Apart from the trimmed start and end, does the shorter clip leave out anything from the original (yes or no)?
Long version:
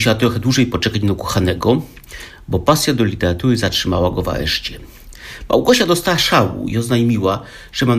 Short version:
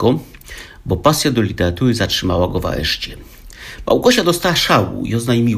no